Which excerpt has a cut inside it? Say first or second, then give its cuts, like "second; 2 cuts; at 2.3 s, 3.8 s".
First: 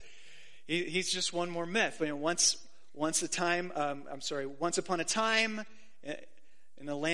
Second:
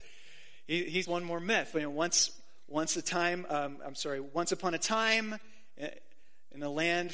second; 1 cut; at 1.0 s